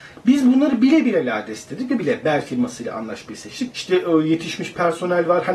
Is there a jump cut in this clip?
yes; 2 cuts; at 2.0 s, 3.7 s

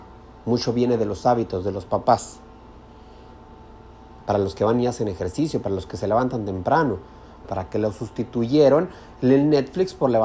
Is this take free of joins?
no; 2 cuts; at 4.2 s, 7.4 s

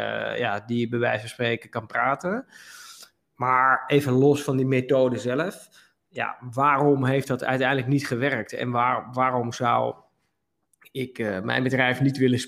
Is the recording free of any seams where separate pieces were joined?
yes; 0 cuts

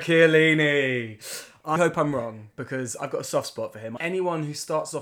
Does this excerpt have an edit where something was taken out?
yes; 2 cuts; at 1.8 s, 4.0 s

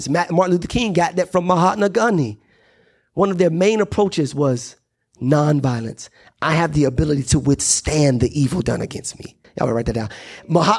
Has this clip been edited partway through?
yes; 1 cut; at 9.4 s

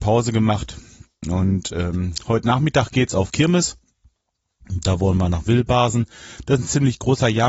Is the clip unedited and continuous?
yes; 0 cuts

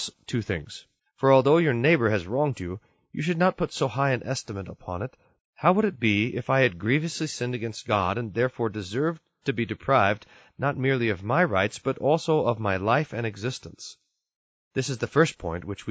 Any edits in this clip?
yes; 2 cuts; at 1.0 s, 5.4 s

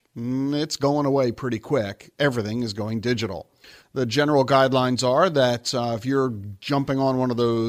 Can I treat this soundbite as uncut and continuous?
no; 1 cut; at 3.8 s

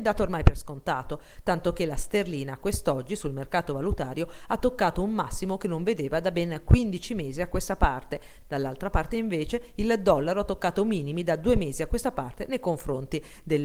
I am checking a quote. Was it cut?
no; 0 cuts

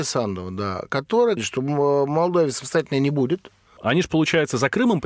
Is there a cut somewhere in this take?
yes; 2 cuts; at 1.4 s, 3.8 s

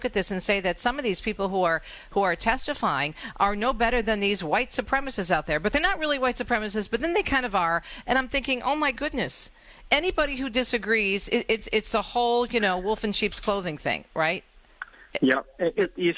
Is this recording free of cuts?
yes; 0 cuts

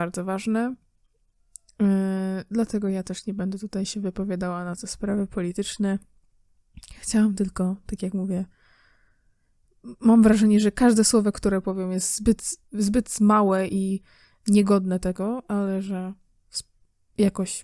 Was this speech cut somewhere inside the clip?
no; 0 cuts

